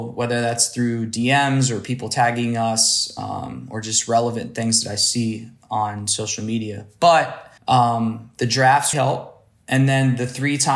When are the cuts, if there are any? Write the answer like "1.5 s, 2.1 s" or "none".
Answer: 7.6 s, 8.9 s